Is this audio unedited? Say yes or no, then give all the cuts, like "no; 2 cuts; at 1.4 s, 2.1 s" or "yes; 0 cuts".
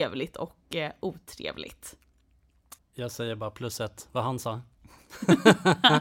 no; 1 cut; at 2.8 s